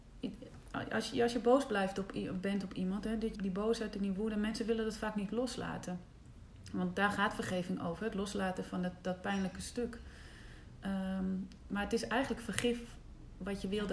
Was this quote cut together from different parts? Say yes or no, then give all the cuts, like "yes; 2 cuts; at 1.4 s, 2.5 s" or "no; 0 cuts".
yes; 1 cut; at 3.3 s